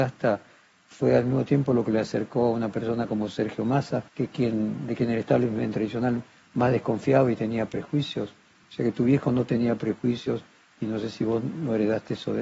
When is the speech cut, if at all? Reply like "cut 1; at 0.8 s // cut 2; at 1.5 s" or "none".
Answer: cut 1; at 4.1 s